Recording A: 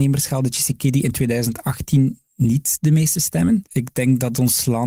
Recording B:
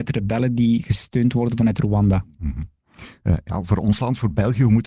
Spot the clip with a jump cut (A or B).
A